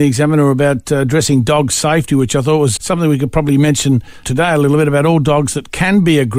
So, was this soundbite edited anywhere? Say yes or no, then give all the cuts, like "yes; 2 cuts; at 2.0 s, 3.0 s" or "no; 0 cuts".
yes; 2 cuts; at 2.8 s, 4.2 s